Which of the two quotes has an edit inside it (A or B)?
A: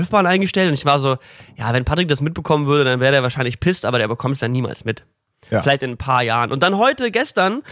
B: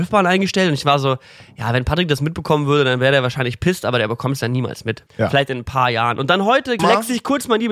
B